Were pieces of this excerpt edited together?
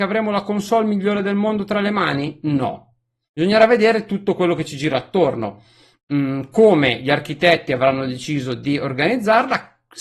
no; 0 cuts

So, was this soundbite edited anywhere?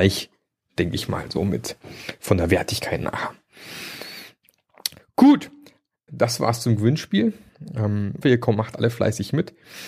yes; 2 cuts; at 6.1 s, 8.2 s

